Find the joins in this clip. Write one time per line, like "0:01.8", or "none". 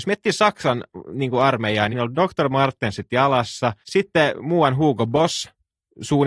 0:01.9
0:03.8